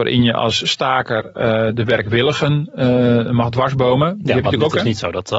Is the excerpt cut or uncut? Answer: uncut